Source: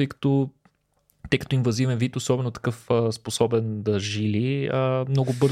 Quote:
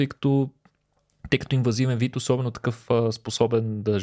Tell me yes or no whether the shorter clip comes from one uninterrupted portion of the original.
yes